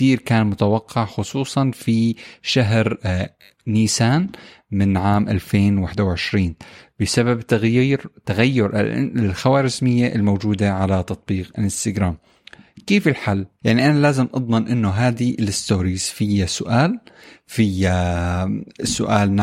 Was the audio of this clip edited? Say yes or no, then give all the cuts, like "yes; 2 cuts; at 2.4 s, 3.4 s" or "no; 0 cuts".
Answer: yes; 1 cut; at 13.6 s